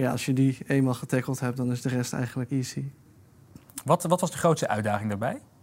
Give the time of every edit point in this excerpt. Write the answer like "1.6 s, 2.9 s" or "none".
2.5 s